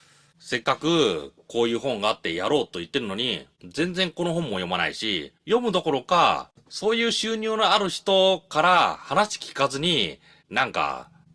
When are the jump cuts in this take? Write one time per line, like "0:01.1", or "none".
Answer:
none